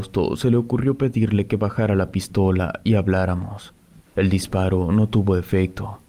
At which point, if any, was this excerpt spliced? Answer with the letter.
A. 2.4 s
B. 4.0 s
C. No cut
B